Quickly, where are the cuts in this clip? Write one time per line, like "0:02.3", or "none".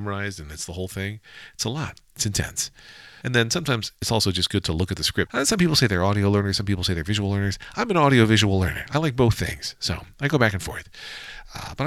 0:03.2
0:05.3